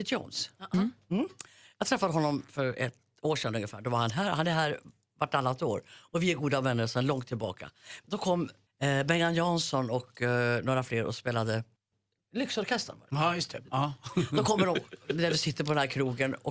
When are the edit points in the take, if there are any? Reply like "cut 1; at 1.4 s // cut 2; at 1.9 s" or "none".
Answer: none